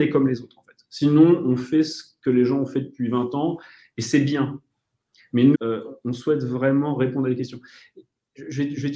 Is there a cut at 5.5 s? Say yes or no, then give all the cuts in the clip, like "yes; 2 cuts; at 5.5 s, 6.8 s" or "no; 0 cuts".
yes; 1 cut; at 5.5 s